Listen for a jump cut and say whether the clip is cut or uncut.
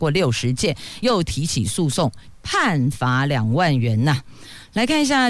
cut